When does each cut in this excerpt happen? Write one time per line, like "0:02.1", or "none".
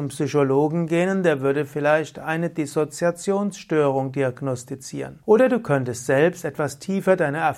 0:05.2